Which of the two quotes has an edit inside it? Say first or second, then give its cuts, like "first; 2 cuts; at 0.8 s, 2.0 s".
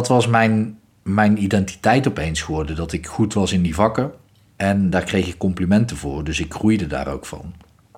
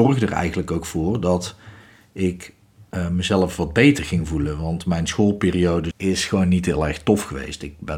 second; 1 cut; at 5.9 s